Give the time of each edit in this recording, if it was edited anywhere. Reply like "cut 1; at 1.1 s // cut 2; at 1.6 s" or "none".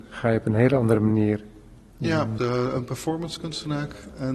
cut 1; at 2.4 s